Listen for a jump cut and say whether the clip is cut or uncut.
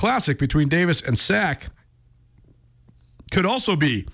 uncut